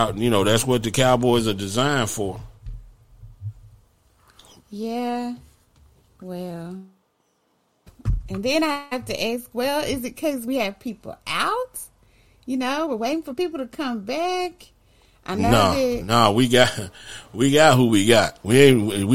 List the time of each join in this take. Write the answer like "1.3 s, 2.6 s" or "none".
none